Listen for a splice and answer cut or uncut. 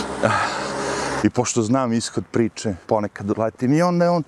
cut